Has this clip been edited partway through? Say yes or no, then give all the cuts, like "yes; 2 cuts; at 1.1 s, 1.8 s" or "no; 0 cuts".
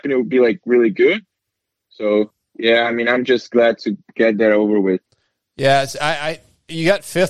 no; 0 cuts